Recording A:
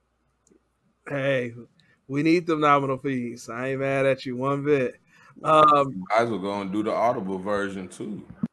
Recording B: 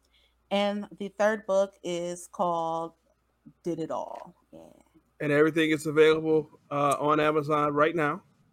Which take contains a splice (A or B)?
B